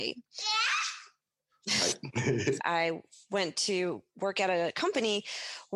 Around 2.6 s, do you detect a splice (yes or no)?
yes